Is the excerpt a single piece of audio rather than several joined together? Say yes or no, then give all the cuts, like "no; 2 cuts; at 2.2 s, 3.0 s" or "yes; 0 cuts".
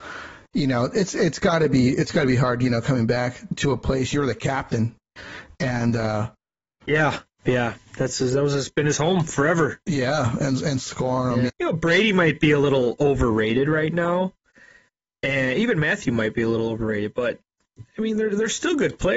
no; 2 cuts; at 3.5 s, 11.5 s